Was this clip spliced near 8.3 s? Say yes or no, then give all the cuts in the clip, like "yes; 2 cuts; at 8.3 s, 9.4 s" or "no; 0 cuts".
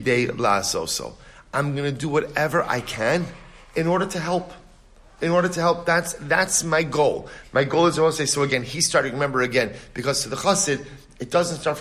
no; 0 cuts